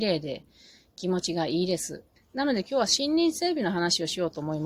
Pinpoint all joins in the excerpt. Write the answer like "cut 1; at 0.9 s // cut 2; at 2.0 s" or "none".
cut 1; at 2.2 s

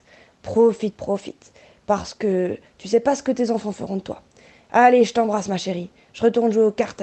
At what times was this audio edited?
cut 1; at 0.9 s

